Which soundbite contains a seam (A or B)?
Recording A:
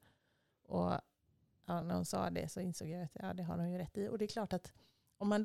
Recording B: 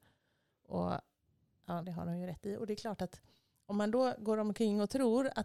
B